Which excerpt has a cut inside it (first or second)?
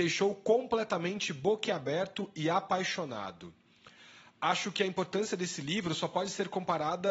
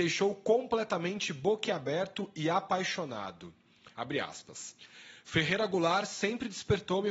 second